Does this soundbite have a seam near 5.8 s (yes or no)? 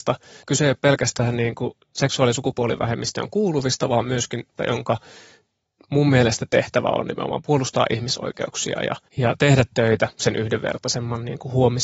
no